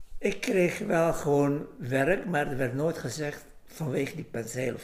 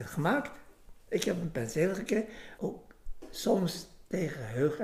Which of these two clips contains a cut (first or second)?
second